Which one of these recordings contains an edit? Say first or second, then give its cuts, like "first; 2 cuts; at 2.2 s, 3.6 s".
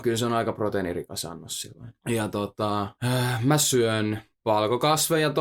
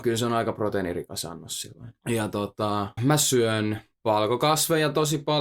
second; 1 cut; at 3.0 s